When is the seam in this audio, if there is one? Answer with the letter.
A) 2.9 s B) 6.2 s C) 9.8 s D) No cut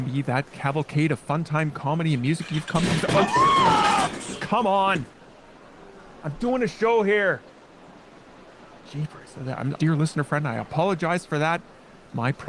C